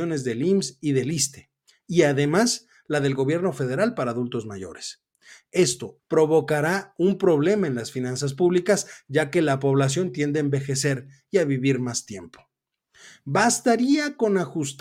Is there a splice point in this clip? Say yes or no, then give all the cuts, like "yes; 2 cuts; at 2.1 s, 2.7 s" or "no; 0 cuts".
yes; 1 cut; at 6.0 s